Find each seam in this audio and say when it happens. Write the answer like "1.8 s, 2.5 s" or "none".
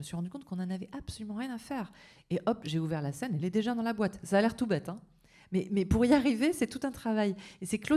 none